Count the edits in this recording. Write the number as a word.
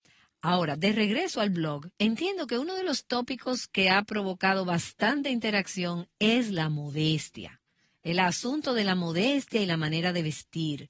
one